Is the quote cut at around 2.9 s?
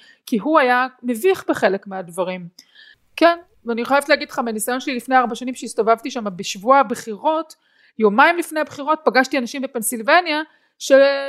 yes; 1 cut; at 2.9 s

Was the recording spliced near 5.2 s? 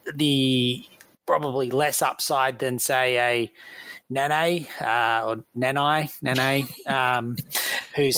no; 0 cuts

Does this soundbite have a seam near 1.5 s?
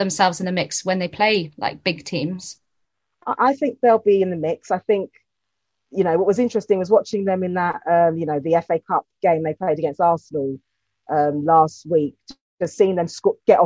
no; 0 cuts

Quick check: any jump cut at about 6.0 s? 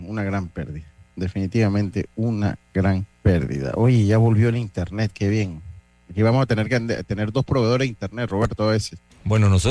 no; 1 cut; at 3.1 s

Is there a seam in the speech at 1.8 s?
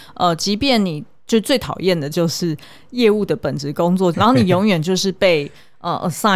no; 1 cut; at 4.1 s

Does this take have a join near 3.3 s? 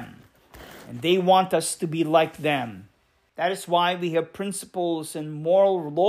yes; 1 cut; at 3.3 s

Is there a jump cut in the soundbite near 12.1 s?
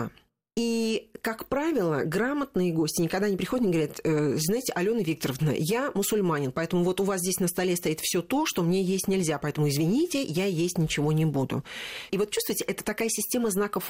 yes; 1 cut; at 12.1 s

